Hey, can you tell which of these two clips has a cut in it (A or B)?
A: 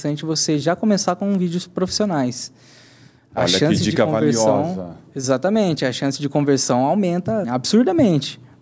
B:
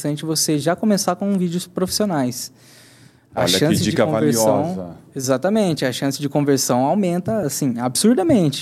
A